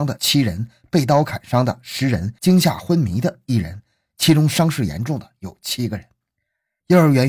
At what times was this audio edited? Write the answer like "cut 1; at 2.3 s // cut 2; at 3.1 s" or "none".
none